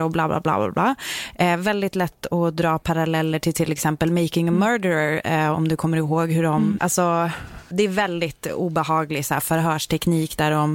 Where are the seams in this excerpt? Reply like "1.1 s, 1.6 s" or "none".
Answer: 6.8 s